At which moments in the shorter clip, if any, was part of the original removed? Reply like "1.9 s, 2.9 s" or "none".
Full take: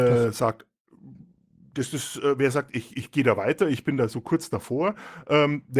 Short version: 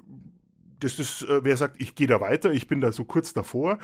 1.8 s